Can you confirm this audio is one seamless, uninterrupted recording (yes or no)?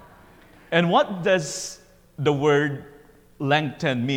yes